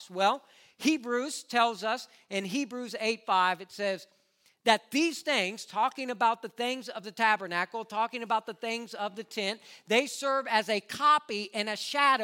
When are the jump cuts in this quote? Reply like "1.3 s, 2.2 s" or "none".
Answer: none